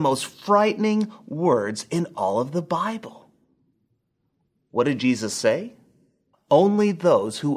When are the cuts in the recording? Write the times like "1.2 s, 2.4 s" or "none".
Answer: 6.3 s